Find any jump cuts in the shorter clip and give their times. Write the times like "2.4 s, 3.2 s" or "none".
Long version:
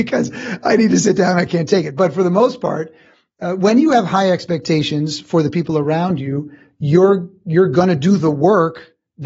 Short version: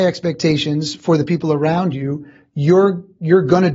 none